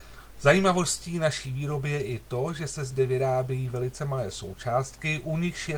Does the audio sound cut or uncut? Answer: uncut